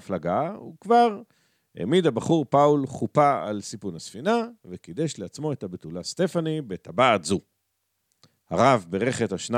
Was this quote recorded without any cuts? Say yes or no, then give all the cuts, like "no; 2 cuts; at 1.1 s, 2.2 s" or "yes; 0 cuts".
yes; 0 cuts